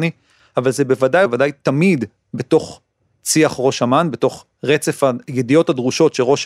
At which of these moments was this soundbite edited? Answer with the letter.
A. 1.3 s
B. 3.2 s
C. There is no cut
A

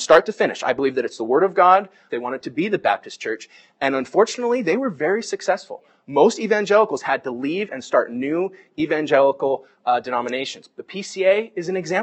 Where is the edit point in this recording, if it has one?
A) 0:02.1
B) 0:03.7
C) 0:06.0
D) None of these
A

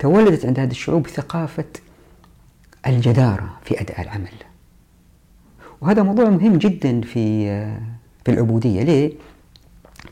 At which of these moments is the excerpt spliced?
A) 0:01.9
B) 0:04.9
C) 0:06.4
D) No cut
D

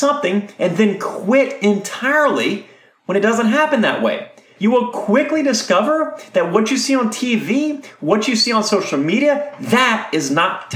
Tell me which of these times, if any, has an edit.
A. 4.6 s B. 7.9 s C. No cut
A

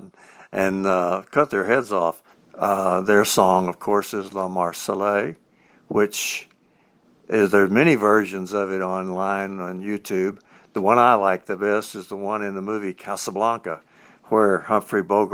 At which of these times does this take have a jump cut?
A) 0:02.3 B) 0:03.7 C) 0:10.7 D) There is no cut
A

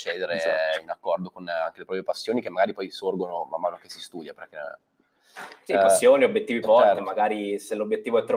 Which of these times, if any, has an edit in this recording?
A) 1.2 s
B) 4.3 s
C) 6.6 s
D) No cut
C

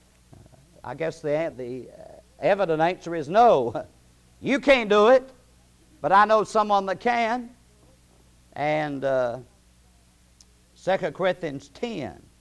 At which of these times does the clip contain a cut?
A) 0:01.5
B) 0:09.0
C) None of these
A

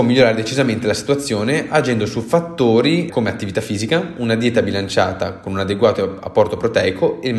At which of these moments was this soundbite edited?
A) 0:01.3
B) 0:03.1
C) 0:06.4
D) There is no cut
B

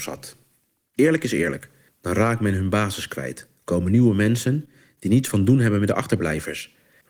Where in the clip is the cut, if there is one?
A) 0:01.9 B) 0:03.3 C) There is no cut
A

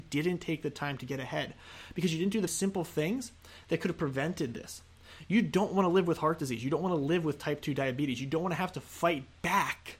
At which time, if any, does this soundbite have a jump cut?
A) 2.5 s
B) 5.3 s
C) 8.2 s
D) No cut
A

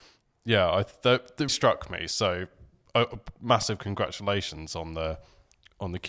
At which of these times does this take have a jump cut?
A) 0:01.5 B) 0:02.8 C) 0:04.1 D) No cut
A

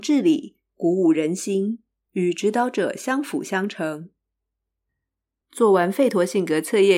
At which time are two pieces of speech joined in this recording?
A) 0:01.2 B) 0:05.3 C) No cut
C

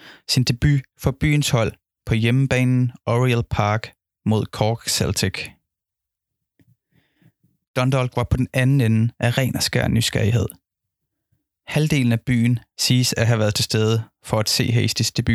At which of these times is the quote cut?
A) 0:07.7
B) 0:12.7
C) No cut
B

